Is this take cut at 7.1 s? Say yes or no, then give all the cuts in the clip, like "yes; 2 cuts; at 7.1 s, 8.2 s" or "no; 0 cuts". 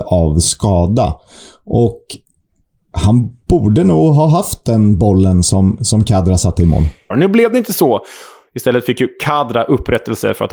yes; 1 cut; at 7.1 s